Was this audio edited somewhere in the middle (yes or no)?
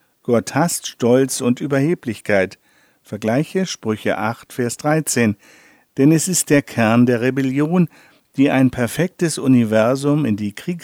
no